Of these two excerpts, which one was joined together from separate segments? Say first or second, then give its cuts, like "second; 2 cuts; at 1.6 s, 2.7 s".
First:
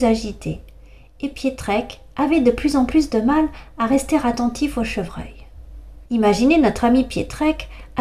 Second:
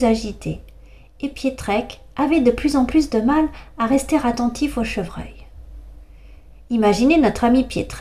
first; 1 cut; at 6.1 s